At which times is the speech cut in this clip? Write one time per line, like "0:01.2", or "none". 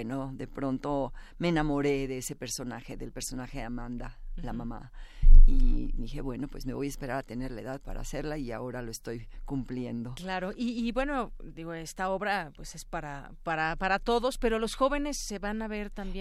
none